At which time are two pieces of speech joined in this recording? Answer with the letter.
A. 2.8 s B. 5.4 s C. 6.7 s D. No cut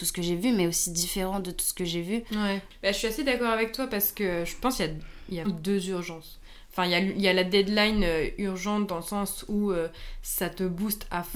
B